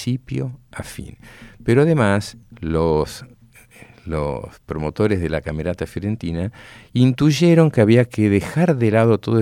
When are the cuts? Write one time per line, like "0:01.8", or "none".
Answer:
none